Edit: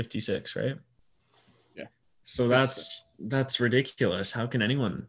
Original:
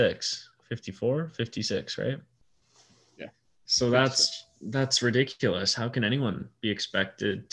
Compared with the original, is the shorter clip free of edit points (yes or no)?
yes